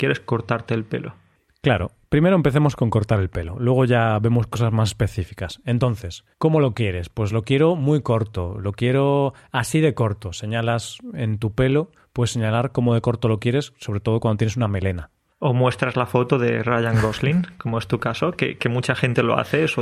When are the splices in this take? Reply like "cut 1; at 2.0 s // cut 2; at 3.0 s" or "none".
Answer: cut 1; at 6.3 s